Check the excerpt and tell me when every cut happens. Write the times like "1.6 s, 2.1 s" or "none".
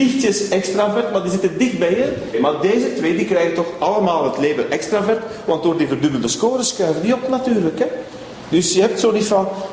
2.3 s